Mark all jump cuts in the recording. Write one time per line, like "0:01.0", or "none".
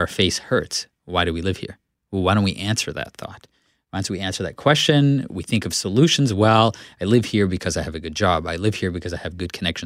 none